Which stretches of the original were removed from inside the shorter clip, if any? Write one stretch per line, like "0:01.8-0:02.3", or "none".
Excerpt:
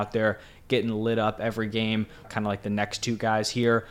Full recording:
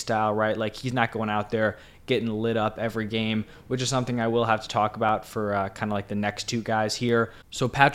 0:03.6-0:05.7